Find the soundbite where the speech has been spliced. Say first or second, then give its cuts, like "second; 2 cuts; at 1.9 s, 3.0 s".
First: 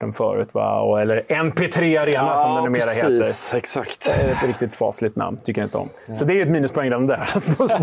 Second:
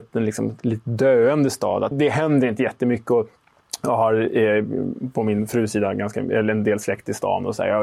second; 1 cut; at 1.9 s